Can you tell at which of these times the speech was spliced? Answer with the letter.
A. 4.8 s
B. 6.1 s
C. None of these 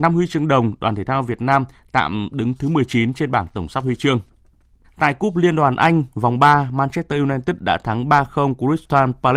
A